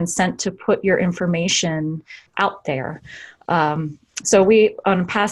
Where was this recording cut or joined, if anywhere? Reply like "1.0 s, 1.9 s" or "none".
2.3 s